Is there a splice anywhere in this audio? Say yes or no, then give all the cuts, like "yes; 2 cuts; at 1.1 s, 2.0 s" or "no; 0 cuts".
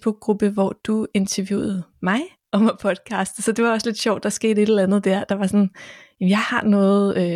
no; 0 cuts